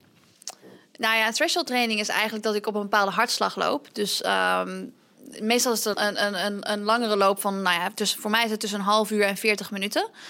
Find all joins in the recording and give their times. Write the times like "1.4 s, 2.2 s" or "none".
5.9 s